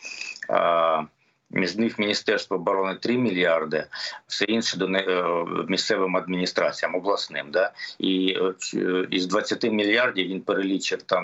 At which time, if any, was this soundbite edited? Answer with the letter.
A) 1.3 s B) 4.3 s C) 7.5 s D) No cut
B